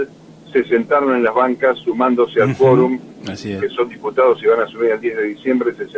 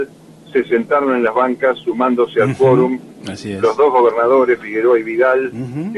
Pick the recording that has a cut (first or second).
first